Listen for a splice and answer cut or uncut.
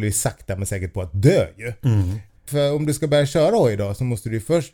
cut